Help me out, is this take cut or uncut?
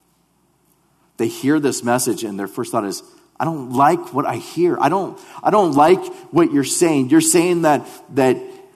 uncut